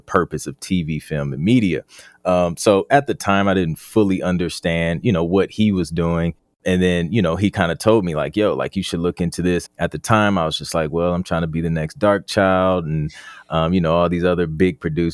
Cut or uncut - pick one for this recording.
cut